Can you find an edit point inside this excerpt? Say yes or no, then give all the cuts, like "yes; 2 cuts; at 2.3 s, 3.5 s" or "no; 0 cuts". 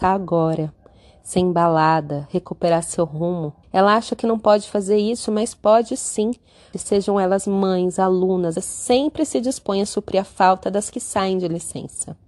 yes; 3 cuts; at 3.6 s, 6.7 s, 8.6 s